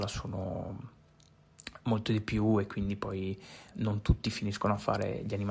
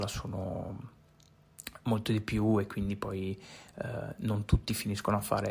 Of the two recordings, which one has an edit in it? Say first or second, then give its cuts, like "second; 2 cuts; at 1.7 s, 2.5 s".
first; 1 cut; at 3.7 s